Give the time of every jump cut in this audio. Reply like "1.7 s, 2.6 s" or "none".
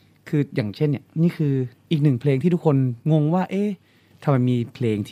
3.0 s